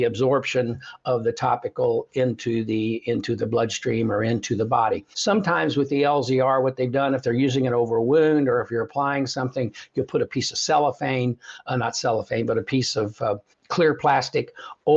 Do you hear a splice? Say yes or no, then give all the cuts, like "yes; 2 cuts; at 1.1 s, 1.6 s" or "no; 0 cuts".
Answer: yes; 2 cuts; at 5.1 s, 13.5 s